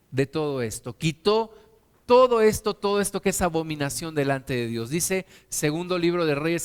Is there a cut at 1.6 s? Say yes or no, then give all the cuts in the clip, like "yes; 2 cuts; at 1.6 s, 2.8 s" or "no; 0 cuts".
no; 0 cuts